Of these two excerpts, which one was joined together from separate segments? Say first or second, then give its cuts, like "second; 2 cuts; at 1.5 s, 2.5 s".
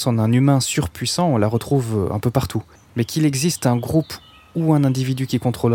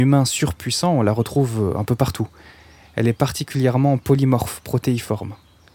first; 1 cut; at 2.8 s